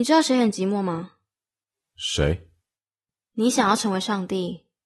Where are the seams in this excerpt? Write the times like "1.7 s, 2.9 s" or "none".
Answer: 3.2 s